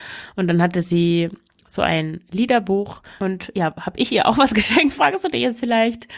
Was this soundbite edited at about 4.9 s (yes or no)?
no